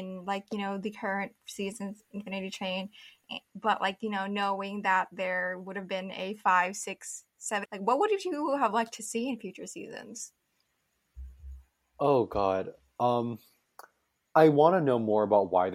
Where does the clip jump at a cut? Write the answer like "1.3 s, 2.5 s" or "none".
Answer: 7.7 s